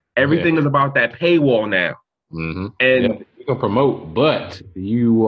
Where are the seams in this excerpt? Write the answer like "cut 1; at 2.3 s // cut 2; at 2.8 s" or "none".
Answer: none